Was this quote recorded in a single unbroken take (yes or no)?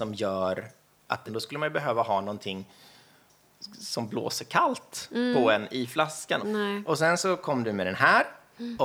no